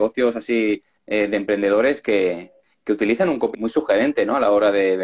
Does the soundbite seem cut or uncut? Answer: cut